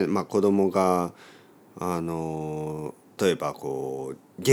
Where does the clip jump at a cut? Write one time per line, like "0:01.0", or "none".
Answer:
0:03.2